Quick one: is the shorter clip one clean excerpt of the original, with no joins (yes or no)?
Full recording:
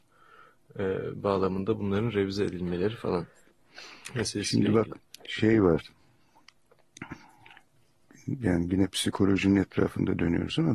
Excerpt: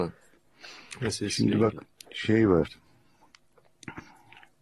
yes